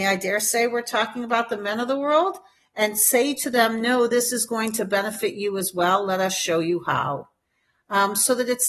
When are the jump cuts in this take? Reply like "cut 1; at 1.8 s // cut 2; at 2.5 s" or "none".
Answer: none